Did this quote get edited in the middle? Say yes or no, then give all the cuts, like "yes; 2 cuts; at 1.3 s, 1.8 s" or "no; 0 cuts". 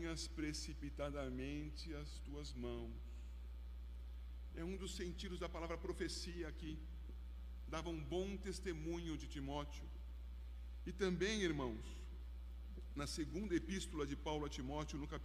yes; 1 cut; at 4.5 s